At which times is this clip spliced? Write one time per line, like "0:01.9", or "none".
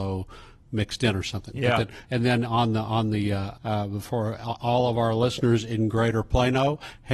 0:03.5